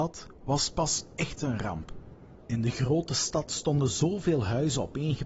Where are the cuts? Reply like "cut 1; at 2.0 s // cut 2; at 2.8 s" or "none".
cut 1; at 2.4 s